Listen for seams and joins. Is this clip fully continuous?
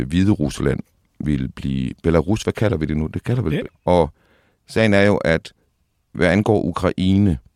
no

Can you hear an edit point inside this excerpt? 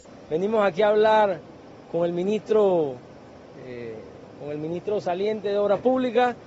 no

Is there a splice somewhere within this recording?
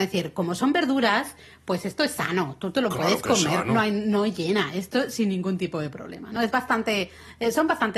no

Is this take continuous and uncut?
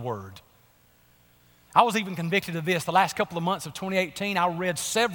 yes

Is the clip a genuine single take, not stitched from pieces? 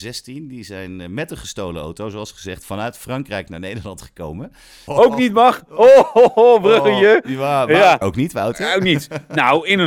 no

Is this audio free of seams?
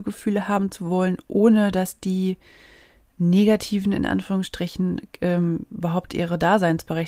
yes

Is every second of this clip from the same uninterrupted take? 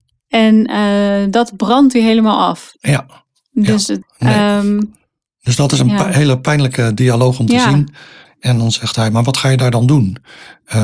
no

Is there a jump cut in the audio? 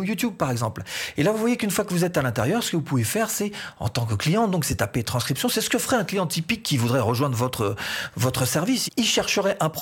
yes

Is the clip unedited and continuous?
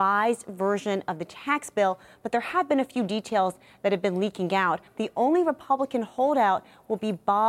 no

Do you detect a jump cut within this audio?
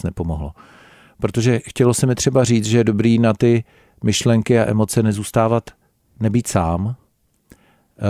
no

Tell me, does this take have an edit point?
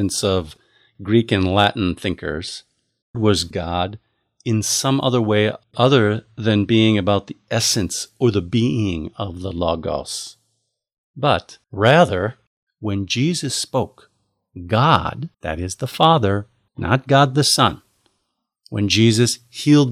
yes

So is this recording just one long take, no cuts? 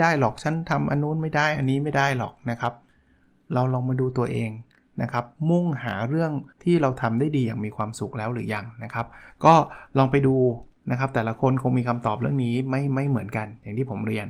no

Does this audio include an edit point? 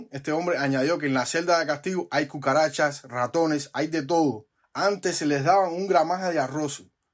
no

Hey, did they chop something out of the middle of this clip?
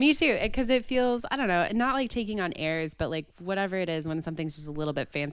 yes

